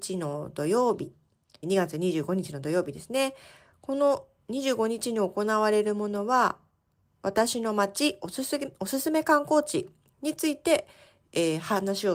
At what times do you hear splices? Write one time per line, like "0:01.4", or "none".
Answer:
0:01.6